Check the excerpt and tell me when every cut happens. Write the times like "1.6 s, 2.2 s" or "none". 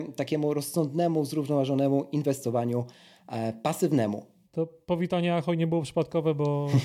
4.4 s